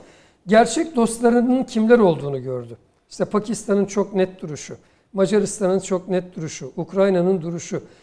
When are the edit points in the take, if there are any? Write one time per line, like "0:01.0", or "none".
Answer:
none